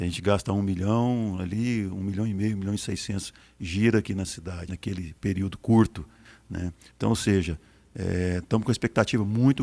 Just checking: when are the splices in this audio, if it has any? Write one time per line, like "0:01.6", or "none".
0:04.7
0:06.9